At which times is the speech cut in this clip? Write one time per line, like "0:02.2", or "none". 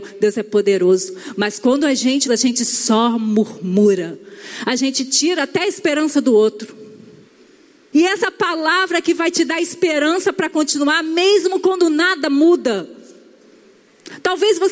0:02.2
0:07.9